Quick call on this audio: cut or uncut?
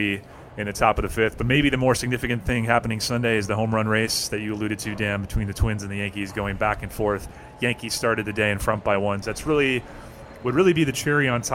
cut